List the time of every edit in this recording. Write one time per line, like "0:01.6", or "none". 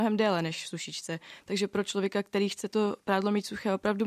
none